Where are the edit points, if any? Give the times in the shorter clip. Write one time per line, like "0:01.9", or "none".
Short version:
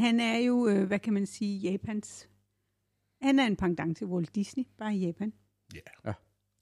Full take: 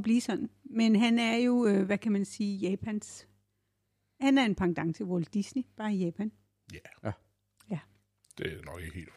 none